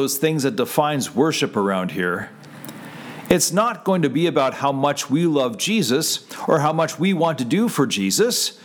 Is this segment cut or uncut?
uncut